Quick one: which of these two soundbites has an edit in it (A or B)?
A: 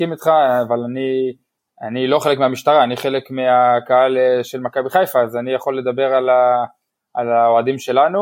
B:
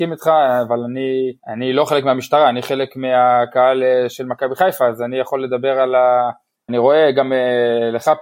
B